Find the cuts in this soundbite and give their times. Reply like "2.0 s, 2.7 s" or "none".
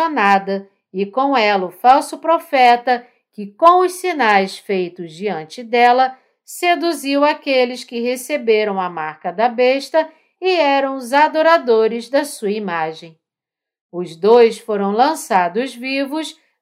none